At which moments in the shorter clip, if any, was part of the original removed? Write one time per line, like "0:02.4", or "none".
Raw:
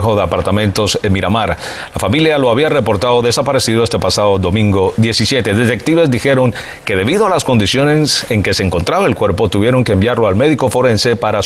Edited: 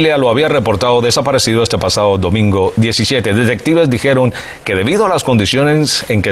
none